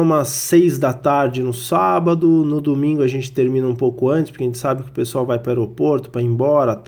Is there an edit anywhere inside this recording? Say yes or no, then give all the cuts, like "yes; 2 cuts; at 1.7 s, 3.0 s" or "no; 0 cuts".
no; 0 cuts